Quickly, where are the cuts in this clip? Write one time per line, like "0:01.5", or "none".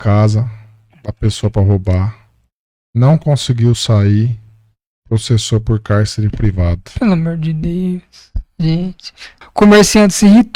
0:09.4